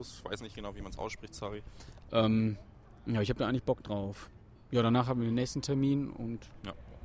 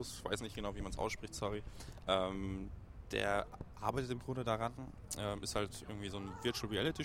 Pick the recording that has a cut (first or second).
first